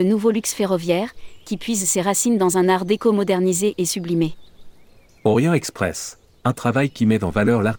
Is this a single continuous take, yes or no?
yes